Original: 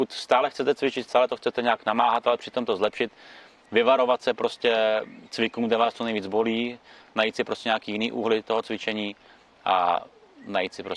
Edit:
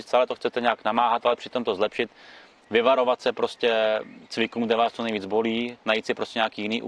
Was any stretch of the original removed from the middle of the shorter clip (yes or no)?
yes